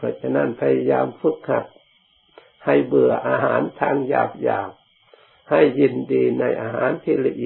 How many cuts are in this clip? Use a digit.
0